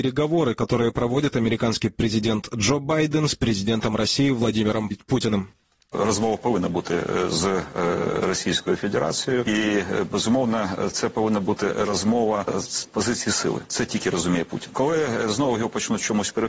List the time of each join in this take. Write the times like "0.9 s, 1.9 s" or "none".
4.9 s